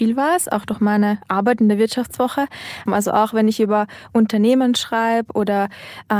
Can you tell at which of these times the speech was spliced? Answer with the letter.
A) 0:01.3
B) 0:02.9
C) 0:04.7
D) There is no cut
B